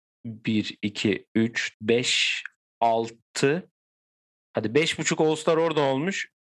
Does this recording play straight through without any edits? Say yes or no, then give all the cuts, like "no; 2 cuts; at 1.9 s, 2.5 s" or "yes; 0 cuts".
no; 1 cut; at 1.7 s